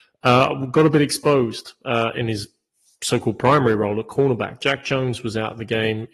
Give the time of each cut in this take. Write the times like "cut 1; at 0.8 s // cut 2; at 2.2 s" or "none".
none